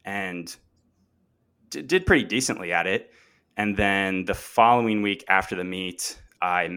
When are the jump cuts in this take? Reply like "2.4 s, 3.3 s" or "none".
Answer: none